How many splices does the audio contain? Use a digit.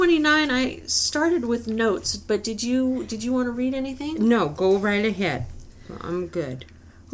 0